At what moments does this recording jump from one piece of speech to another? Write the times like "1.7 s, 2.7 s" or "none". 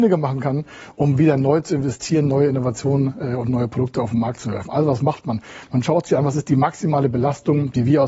none